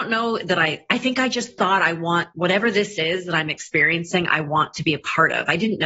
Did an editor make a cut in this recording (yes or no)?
no